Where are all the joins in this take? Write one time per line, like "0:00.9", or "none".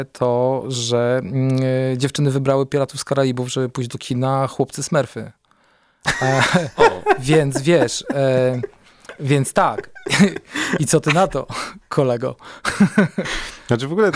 none